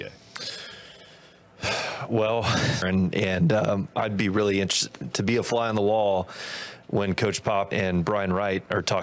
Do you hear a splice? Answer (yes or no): yes